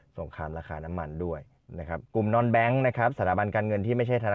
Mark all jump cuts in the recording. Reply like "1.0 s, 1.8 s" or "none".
2.0 s